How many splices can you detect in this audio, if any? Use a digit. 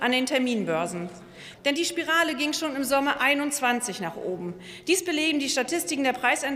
1